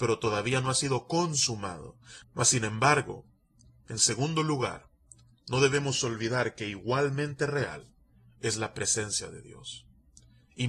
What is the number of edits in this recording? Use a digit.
1